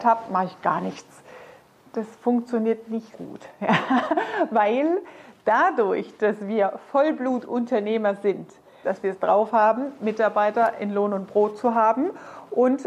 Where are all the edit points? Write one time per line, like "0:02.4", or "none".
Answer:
0:03.1
0:08.8
0:10.0